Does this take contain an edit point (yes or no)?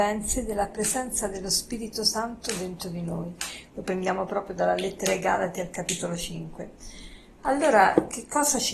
yes